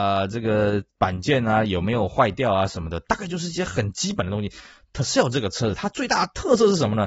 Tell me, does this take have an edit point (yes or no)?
no